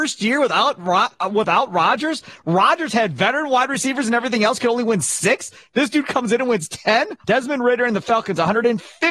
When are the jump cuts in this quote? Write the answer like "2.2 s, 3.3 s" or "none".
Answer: 7.2 s